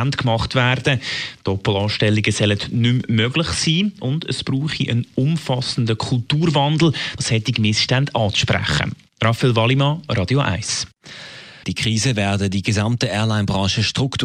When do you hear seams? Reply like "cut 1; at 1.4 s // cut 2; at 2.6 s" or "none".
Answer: cut 1; at 7.2 s // cut 2; at 11.6 s